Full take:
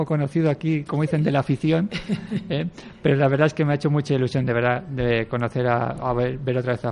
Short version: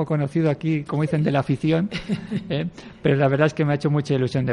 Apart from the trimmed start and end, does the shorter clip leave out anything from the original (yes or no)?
no